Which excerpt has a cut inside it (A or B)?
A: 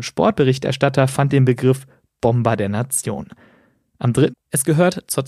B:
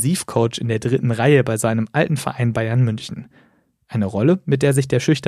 A